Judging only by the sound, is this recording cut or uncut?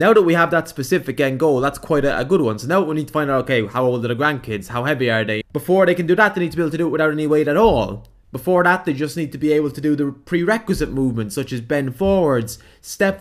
cut